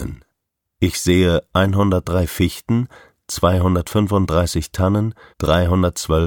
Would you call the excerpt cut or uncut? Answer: cut